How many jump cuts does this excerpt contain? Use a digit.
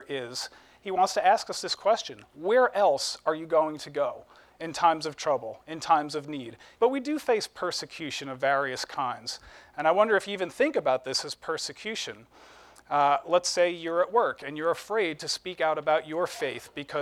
1